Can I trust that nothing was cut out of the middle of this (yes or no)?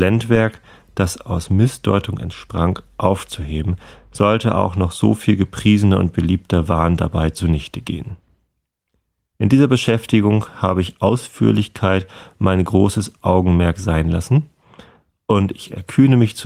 yes